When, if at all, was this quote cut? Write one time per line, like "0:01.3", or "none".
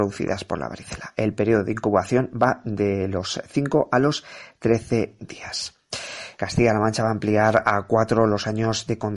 0:06.4